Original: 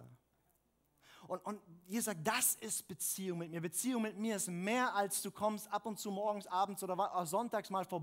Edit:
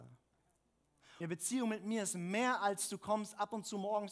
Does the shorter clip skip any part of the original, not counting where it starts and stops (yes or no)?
yes